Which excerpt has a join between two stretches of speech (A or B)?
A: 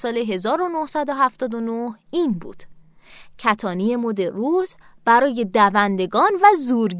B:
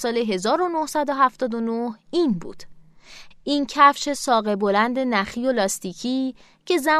B